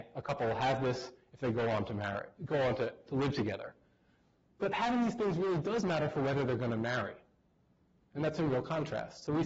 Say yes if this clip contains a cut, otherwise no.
no